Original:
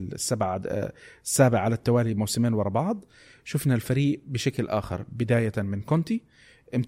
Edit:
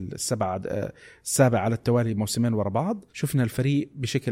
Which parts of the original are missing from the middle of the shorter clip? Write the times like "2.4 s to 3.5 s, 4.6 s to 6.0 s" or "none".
3.1 s to 3.4 s